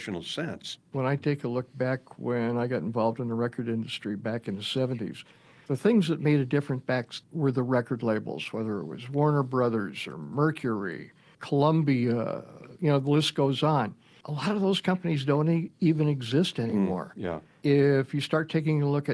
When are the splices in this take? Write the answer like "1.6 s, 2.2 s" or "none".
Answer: 7.2 s